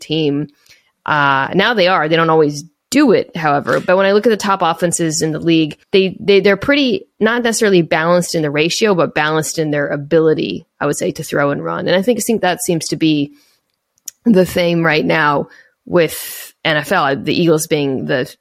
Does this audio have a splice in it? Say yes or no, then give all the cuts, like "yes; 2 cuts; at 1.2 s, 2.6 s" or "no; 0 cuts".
yes; 1 cut; at 5.8 s